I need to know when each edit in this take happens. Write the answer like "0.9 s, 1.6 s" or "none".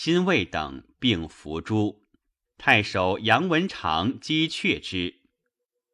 2.4 s